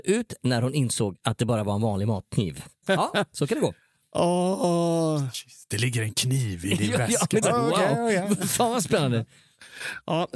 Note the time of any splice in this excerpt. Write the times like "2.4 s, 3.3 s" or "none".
2.8 s, 7.4 s